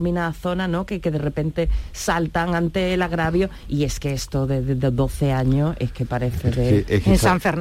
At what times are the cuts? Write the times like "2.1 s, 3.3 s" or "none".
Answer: none